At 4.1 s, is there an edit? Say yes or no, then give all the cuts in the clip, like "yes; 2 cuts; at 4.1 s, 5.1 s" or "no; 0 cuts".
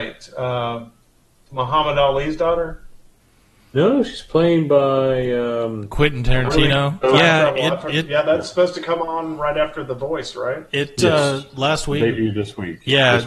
no; 1 cut; at 7.0 s